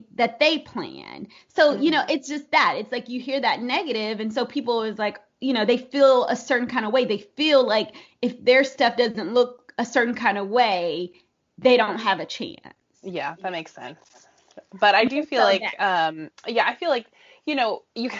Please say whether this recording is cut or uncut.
uncut